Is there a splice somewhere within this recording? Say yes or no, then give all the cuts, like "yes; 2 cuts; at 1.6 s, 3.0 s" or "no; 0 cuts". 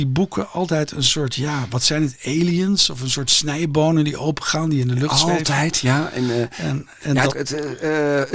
yes; 1 cut; at 7.3 s